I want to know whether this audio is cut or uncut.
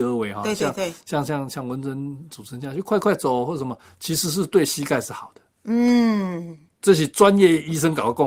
uncut